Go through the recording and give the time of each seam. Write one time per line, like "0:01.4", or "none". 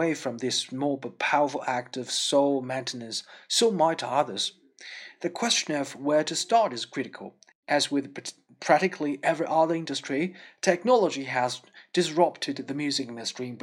none